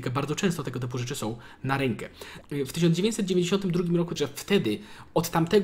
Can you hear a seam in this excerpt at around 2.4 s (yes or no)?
yes